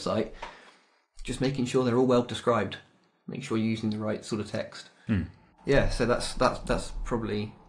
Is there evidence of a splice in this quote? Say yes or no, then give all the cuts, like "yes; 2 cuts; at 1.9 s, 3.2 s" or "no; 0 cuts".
no; 0 cuts